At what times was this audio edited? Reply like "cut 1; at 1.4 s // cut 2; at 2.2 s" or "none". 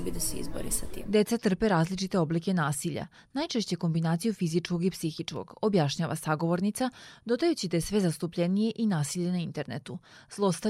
none